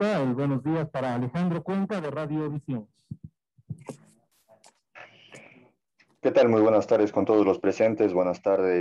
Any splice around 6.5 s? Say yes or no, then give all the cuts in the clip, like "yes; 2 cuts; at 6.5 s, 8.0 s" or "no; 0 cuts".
no; 0 cuts